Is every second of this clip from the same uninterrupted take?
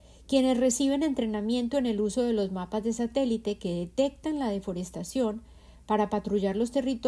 yes; 0 cuts

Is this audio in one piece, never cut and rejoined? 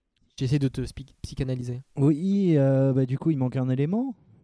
yes; 0 cuts

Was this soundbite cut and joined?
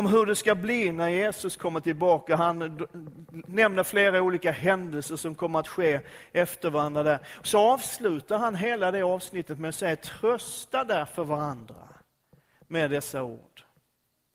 no; 0 cuts

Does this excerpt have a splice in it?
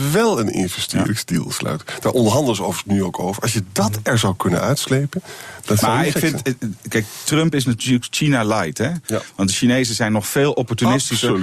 no; 0 cuts

